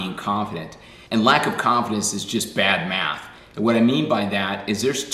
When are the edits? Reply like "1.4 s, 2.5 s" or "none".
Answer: none